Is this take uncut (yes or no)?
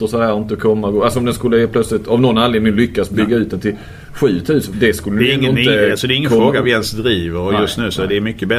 no